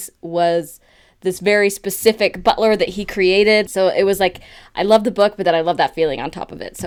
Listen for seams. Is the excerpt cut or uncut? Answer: cut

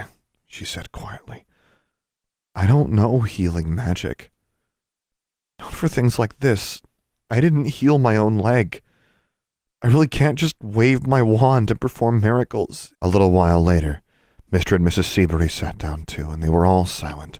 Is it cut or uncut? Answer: cut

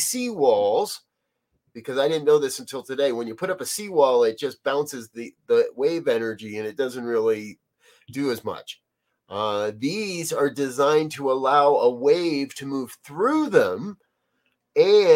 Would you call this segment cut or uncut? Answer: uncut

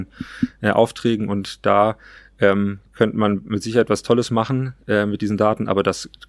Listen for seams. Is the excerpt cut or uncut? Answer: uncut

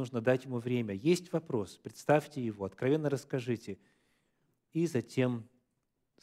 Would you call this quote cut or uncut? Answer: uncut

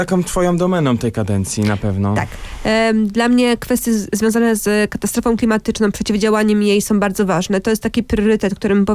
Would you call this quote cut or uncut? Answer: uncut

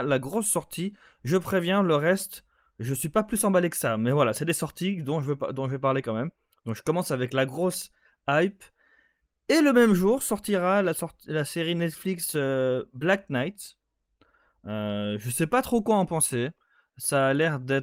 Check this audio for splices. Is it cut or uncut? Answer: uncut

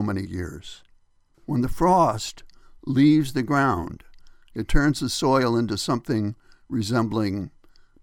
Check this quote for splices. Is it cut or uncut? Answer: cut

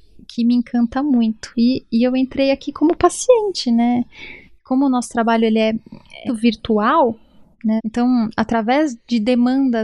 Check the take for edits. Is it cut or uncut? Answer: cut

